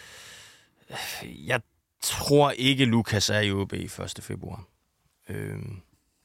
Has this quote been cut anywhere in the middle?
no; 0 cuts

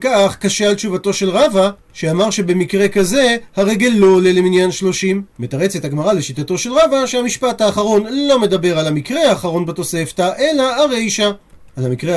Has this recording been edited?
no; 0 cuts

